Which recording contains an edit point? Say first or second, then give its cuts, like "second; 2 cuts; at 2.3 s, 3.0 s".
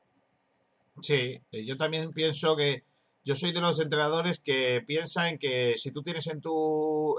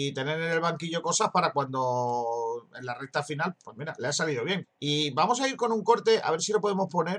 second; 2 cuts; at 3.5 s, 4.6 s